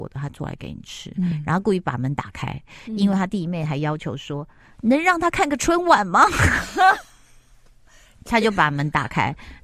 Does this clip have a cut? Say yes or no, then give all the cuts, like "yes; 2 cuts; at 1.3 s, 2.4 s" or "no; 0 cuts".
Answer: no; 0 cuts